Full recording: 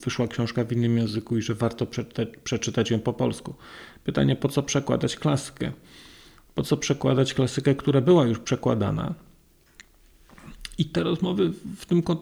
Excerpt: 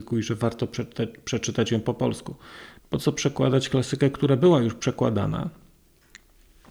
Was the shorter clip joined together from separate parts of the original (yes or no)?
yes